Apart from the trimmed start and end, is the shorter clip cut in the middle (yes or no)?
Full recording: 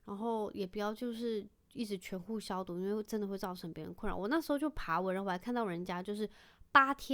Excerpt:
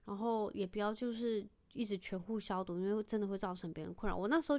no